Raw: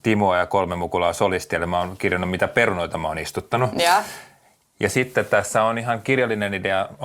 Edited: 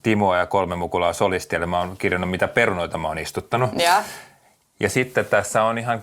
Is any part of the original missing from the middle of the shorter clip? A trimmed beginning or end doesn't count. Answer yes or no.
no